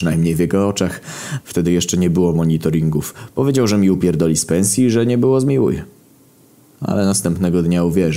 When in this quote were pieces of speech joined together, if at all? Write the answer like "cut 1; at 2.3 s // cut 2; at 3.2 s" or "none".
cut 1; at 1.4 s